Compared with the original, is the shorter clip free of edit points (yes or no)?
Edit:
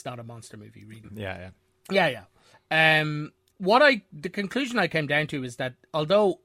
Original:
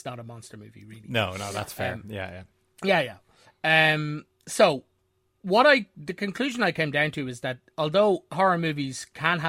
no